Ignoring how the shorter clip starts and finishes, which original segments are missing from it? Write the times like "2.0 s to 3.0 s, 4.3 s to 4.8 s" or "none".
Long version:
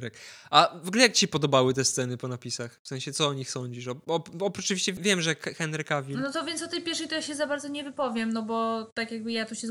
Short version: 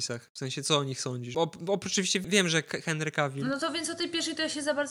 3.8 s to 4.1 s